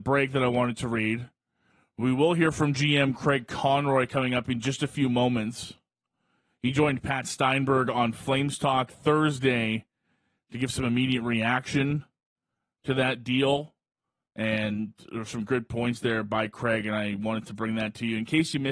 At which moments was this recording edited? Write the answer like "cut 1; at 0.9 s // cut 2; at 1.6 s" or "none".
none